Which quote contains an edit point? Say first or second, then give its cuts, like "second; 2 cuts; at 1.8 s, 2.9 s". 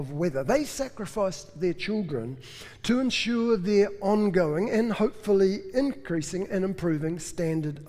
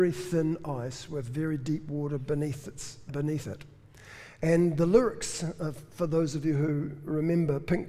second; 1 cut; at 3.1 s